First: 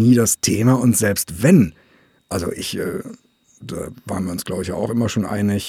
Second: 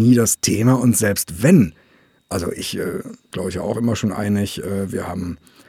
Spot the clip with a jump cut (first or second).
second